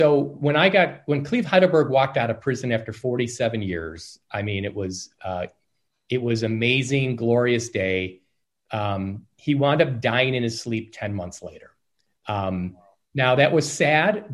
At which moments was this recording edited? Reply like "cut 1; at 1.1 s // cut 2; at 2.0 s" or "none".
none